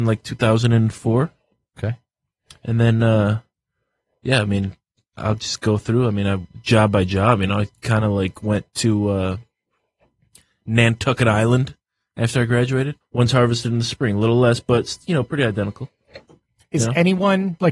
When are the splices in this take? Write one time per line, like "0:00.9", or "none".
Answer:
0:13.0

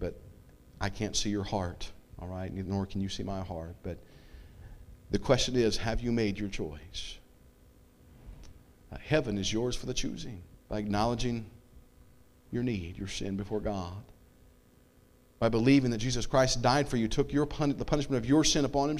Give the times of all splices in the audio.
0:10.6

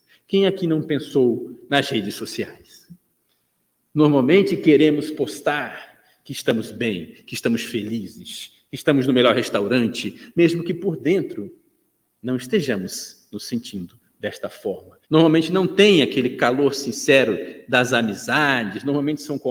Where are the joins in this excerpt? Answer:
0:15.0

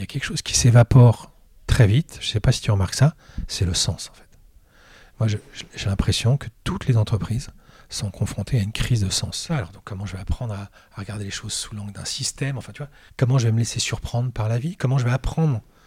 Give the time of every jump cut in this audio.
0:09.5
0:13.1

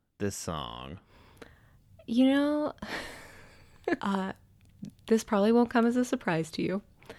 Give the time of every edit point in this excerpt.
0:04.0

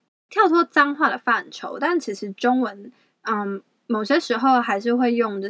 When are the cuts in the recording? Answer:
none

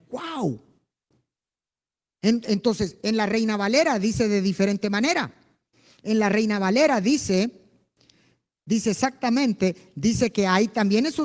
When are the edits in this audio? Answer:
none

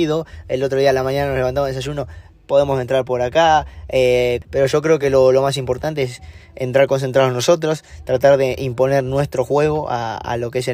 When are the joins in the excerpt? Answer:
none

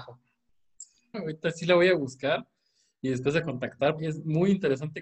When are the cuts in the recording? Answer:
0:01.1
0:04.0

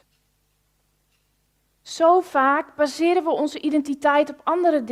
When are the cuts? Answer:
none

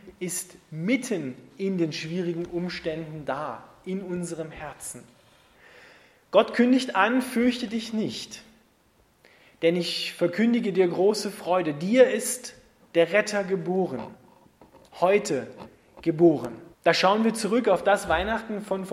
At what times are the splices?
0:16.7

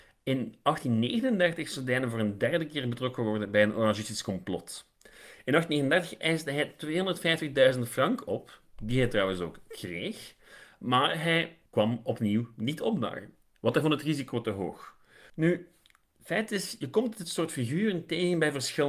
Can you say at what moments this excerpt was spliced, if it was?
0:11.7
0:15.3

